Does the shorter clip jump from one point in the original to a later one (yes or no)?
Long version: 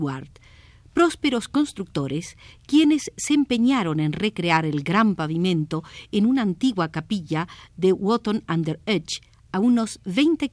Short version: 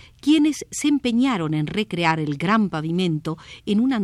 no